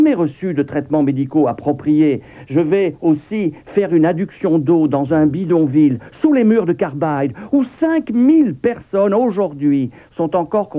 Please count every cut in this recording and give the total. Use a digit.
0